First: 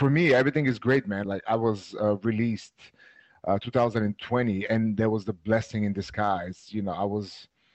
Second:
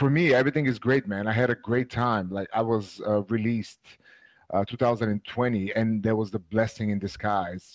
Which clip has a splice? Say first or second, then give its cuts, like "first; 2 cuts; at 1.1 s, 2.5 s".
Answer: first; 1 cut; at 1.2 s